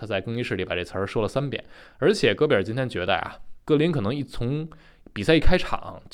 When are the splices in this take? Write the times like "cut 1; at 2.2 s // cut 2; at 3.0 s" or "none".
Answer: cut 1; at 3.5 s